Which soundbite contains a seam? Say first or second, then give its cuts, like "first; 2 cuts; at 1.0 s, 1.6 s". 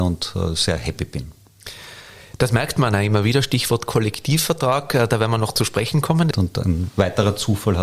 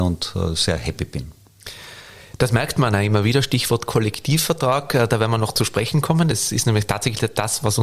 first; 1 cut; at 6.3 s